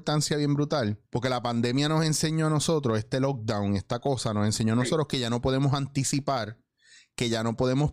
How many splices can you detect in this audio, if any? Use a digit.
1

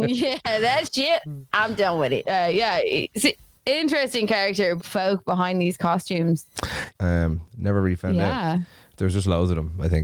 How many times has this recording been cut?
3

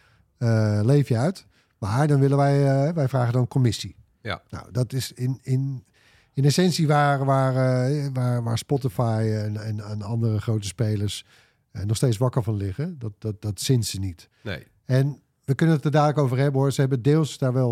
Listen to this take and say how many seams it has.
1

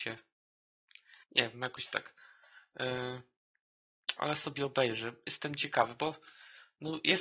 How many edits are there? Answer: 1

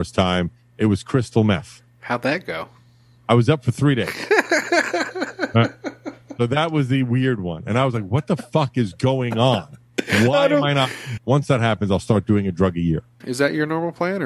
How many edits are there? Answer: 2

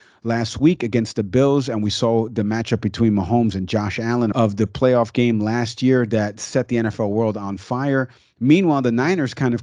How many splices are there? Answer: 1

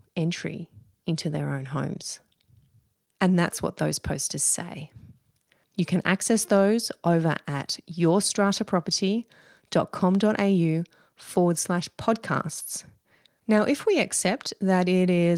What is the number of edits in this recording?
3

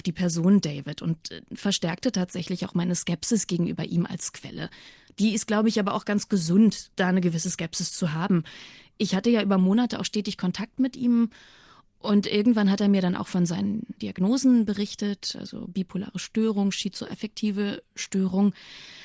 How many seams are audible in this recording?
1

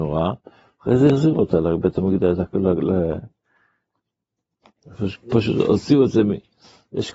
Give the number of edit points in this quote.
0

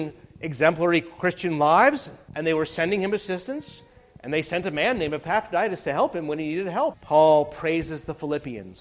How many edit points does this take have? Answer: 2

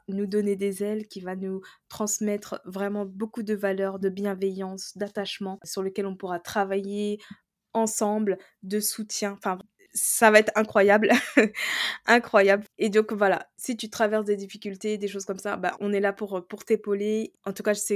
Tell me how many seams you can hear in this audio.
2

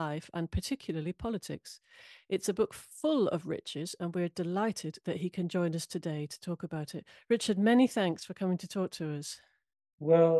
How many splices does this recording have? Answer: 0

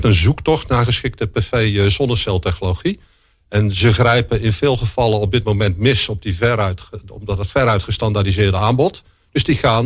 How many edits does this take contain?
0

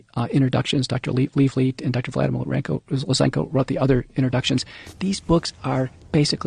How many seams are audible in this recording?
0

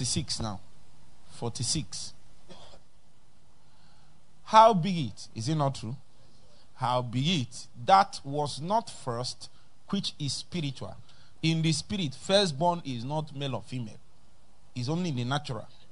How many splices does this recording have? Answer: 2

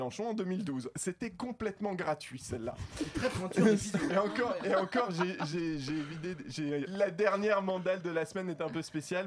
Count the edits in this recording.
2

